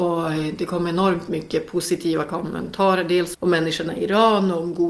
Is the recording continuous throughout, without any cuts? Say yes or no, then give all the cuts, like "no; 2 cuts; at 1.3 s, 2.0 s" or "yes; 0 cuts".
no; 1 cut; at 3.3 s